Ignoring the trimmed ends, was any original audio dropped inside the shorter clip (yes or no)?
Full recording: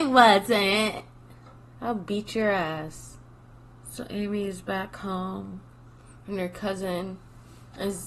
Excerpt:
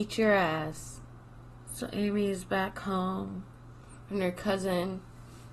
no